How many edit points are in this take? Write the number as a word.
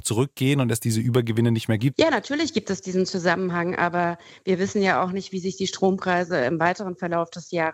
one